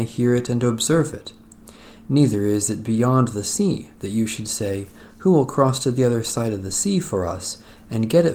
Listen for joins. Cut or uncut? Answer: uncut